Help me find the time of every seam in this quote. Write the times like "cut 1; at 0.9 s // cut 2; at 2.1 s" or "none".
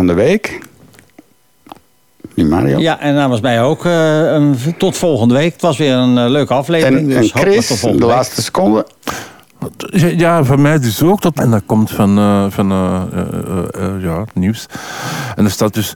cut 1; at 11.4 s

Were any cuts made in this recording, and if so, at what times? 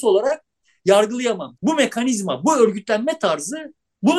cut 1; at 1.5 s

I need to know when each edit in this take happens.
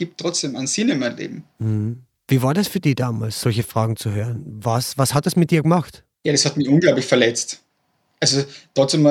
none

